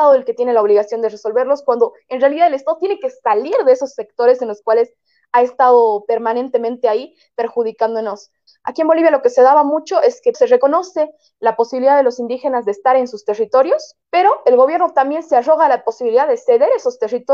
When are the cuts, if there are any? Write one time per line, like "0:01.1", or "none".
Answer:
0:08.5
0:10.3
0:14.0